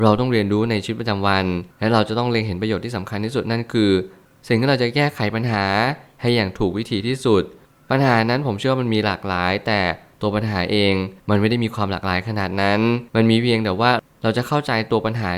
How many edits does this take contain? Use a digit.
3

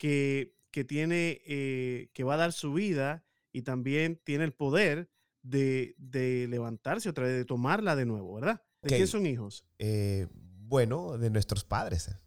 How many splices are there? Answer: 1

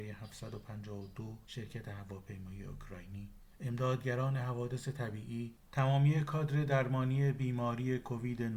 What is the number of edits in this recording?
1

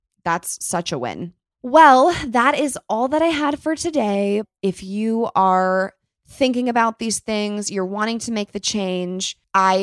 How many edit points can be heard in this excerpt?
0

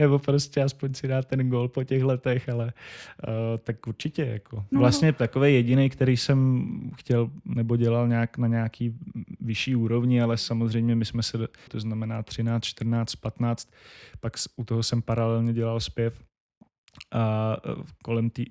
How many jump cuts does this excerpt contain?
2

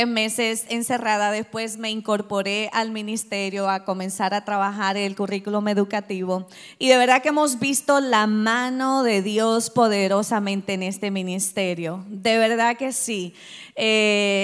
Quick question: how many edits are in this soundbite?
0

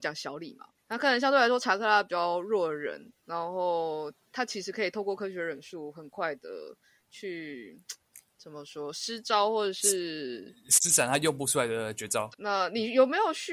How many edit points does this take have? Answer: 1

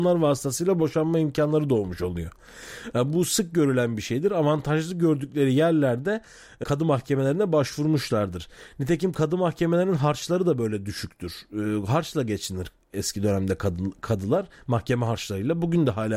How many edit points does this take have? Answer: 1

